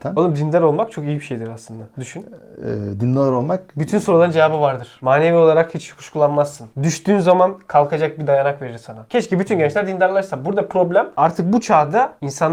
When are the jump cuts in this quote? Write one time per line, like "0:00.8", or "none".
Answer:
none